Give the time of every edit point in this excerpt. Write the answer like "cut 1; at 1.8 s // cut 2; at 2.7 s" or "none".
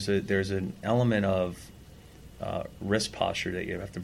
none